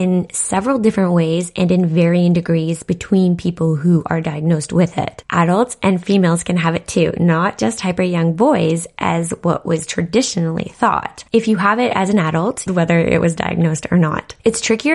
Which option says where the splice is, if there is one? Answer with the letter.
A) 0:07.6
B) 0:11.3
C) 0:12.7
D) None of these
C